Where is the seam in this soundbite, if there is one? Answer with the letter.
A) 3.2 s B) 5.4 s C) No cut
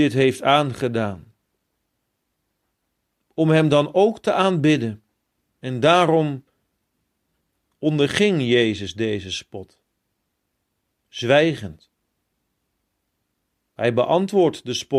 B